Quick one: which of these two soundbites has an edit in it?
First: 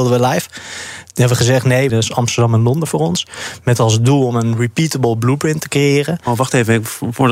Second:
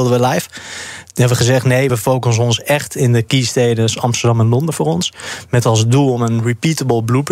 first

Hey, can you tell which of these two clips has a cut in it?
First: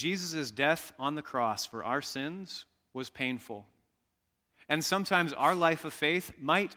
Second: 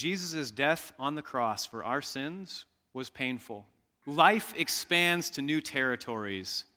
second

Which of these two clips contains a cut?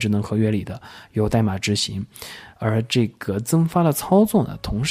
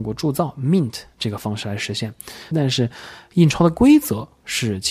second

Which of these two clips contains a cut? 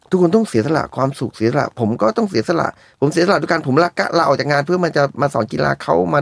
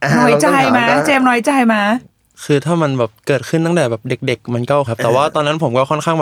second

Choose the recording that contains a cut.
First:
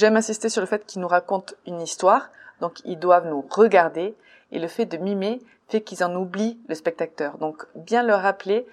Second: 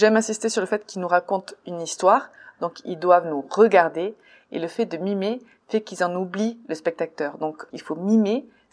second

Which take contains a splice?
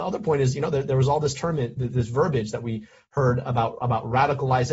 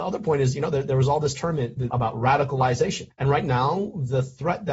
second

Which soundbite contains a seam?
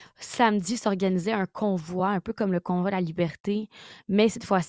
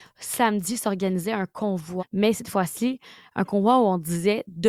second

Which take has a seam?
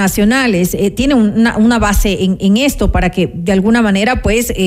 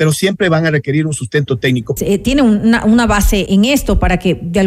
second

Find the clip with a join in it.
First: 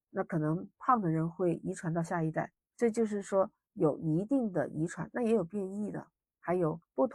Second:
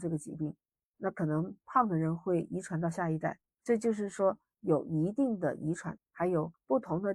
second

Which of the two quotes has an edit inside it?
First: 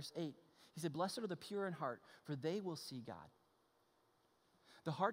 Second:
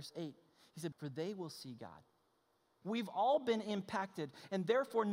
second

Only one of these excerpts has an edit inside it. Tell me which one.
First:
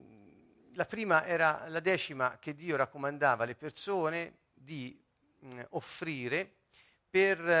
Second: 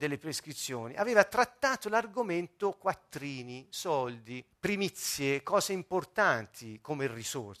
second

